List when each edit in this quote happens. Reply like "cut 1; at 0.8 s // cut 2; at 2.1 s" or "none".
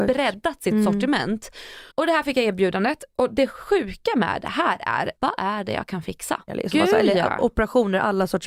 cut 1; at 1.9 s // cut 2; at 5.2 s // cut 3; at 6.5 s

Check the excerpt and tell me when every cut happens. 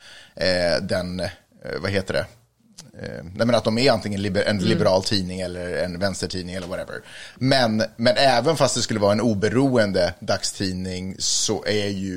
none

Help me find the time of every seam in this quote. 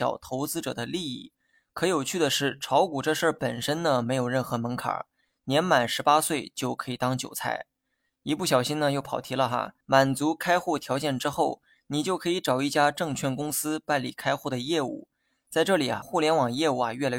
cut 1; at 9.8 s // cut 2; at 16.0 s

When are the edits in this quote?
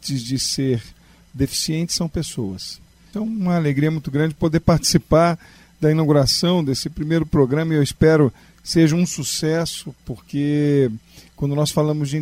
cut 1; at 3.1 s

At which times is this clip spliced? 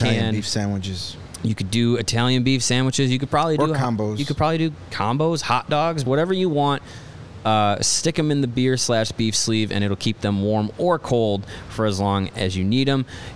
cut 1; at 6.0 s

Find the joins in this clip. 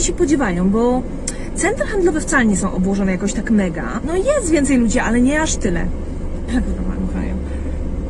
cut 1; at 4.0 s // cut 2; at 6.5 s

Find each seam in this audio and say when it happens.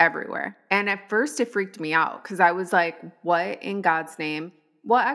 none

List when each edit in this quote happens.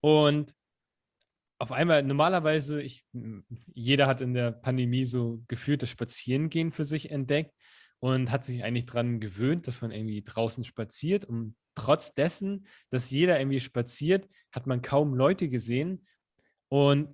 none

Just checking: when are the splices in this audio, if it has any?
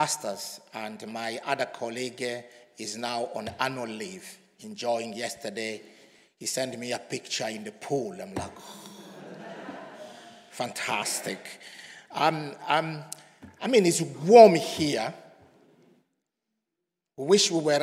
none

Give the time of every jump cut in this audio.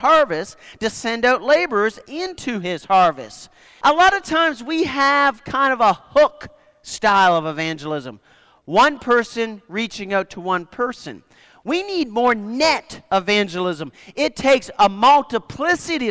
cut 1; at 3.8 s

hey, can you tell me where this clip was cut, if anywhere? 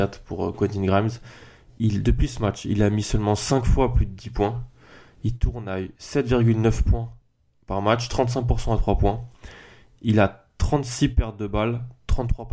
none

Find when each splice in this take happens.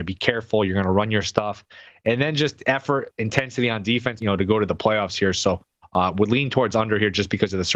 cut 1; at 4.2 s

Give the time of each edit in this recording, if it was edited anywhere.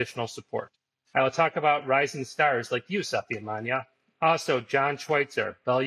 cut 1; at 1.0 s

